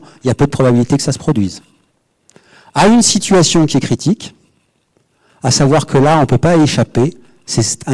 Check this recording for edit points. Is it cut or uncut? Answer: uncut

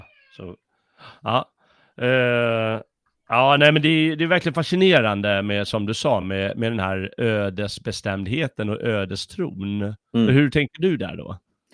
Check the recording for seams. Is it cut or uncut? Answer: uncut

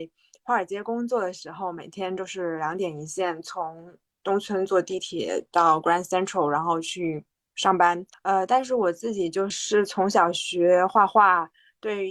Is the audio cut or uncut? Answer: cut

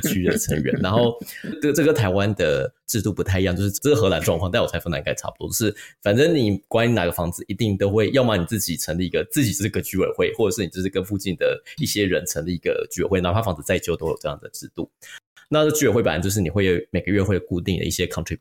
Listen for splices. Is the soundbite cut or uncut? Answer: uncut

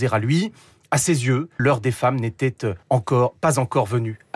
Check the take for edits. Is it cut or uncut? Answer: cut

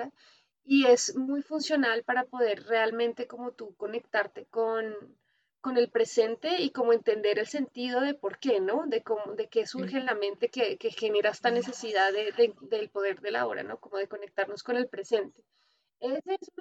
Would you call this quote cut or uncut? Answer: uncut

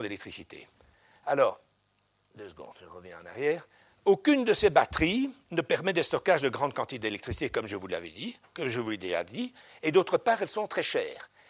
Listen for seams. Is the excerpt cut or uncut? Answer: uncut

